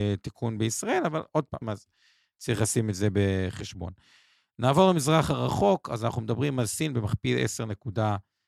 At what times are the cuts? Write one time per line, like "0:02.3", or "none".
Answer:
0:01.6